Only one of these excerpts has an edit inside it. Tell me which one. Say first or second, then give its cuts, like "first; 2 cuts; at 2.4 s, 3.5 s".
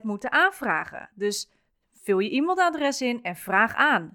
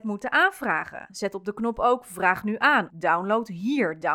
second; 2 cuts; at 1.1 s, 2.9 s